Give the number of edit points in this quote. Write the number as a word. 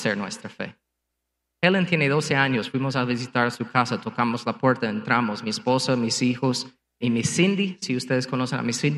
one